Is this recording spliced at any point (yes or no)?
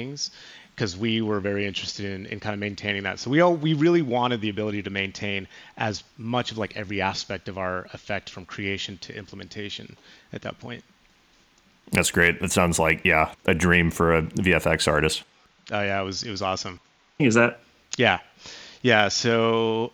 yes